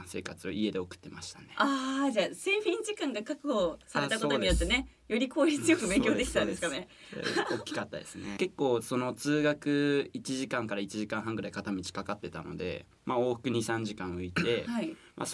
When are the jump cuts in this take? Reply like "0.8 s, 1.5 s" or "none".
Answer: 8.4 s